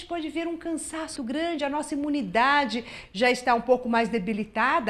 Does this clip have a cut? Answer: yes; 1 cut; at 1.2 s

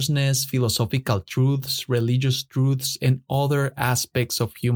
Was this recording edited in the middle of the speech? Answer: no; 0 cuts

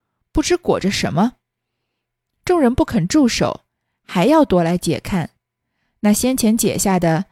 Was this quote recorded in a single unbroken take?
yes; 0 cuts

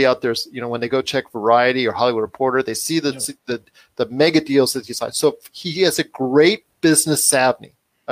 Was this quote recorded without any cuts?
yes; 0 cuts

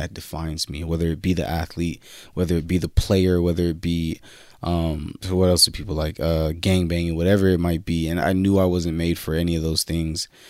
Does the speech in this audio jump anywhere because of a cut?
yes; 2 cuts; at 5.2 s, 8.2 s

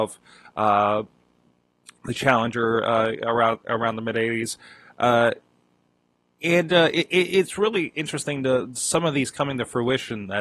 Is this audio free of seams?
no; 1 cut; at 8.7 s

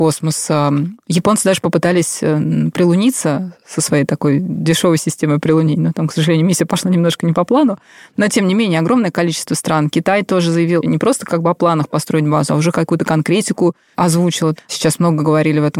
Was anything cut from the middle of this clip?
yes; 1 cut; at 14.6 s

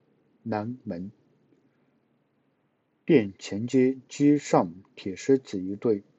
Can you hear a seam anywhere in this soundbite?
no; 0 cuts

